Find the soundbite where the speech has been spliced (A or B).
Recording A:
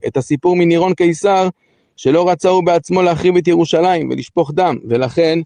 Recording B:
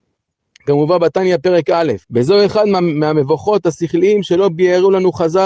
B